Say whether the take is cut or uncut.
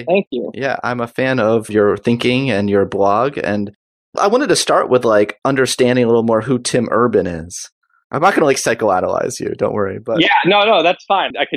uncut